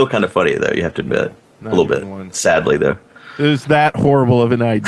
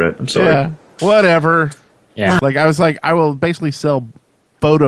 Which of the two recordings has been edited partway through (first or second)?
second